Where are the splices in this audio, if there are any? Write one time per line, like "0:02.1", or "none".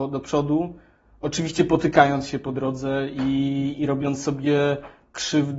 none